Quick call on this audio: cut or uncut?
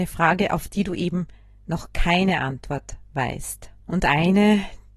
cut